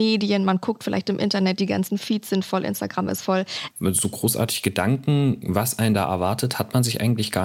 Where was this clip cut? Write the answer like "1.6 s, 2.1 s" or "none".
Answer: 3.7 s